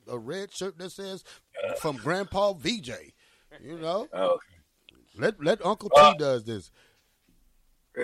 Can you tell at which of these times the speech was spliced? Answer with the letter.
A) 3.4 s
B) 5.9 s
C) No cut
C